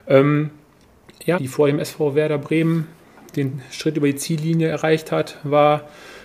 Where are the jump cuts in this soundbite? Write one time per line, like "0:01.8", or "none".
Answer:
0:01.4